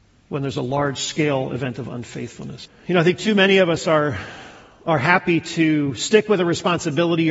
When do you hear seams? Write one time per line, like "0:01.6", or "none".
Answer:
0:02.7